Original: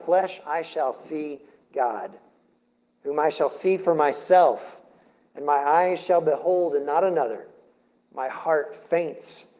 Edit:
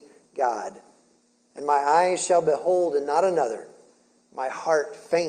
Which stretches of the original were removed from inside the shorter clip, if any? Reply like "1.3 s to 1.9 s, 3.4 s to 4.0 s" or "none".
2.9 s to 5.3 s